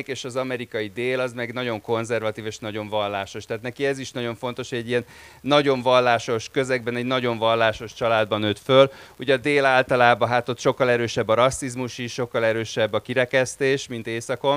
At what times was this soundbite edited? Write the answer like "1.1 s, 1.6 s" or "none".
none